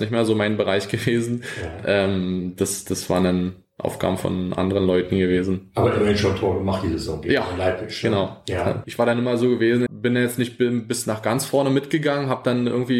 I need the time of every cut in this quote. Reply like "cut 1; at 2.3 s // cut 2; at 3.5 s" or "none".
cut 1; at 8.8 s // cut 2; at 9.9 s